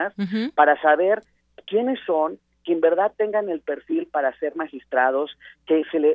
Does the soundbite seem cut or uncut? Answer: uncut